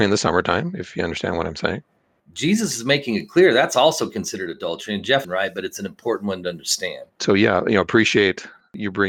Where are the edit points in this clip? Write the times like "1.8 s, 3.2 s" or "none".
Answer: 2.2 s, 5.2 s, 7.2 s